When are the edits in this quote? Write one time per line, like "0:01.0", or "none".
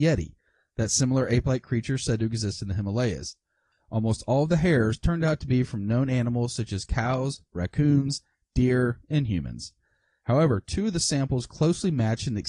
none